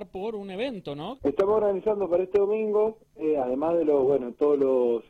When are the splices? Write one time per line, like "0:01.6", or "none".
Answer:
0:01.2